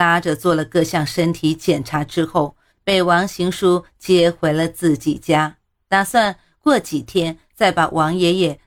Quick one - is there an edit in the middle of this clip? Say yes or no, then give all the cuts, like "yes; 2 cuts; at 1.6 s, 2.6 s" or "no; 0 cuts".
yes; 1 cut; at 2.7 s